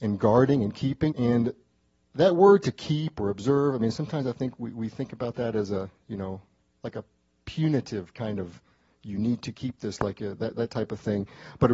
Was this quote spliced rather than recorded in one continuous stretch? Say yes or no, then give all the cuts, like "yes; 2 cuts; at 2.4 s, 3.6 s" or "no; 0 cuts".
yes; 1 cut; at 1.1 s